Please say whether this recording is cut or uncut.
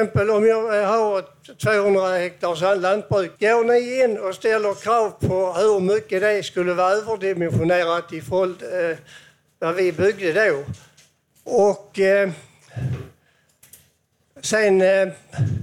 cut